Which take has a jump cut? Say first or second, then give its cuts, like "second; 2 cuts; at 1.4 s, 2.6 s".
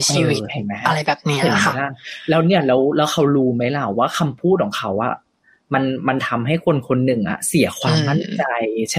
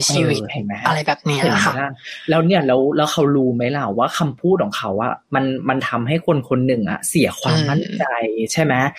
second; 1 cut; at 5.2 s